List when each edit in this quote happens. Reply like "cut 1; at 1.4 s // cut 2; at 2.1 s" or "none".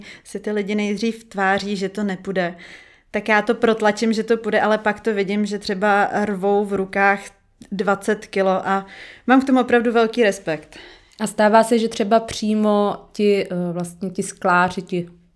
none